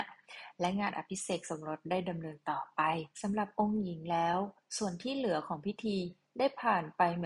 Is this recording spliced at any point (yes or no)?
yes